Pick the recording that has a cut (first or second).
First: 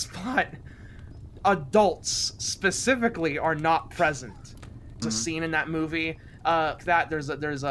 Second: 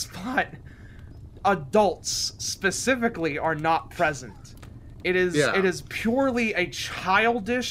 first